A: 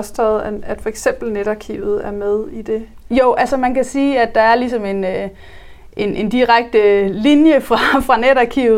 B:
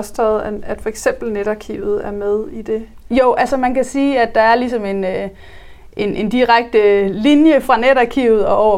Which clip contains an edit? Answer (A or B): B